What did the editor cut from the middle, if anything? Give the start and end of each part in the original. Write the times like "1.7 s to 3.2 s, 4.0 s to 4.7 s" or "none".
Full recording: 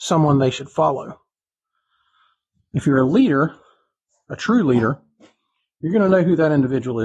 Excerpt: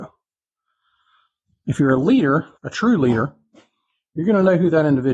3.6 s to 4.2 s